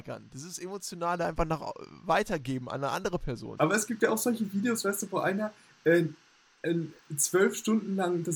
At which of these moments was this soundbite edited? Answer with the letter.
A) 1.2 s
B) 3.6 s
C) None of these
B